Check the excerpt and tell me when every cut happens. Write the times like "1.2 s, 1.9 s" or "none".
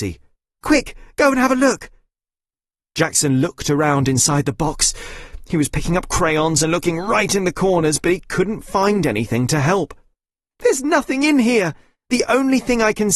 none